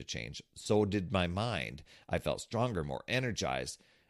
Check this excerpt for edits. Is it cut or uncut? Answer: uncut